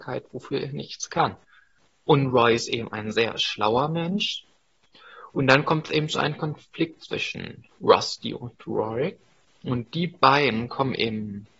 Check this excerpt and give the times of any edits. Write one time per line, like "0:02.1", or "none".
none